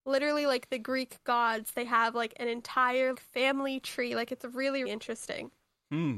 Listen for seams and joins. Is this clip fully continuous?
no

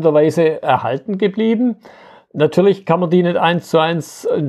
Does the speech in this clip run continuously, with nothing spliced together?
yes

